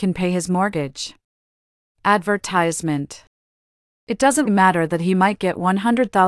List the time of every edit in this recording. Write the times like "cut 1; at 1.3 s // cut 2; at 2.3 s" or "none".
cut 1; at 1.9 s // cut 2; at 4.5 s